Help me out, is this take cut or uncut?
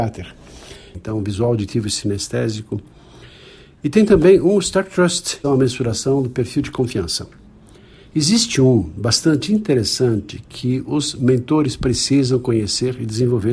cut